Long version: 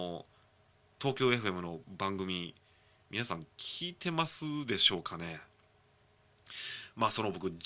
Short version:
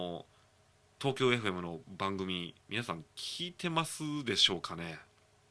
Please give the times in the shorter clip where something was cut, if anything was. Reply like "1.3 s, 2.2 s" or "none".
2.6 s